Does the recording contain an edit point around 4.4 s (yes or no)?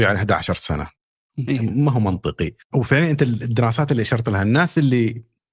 no